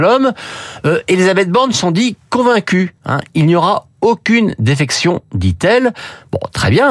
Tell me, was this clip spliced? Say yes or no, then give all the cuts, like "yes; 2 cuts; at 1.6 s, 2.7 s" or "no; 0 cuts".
no; 0 cuts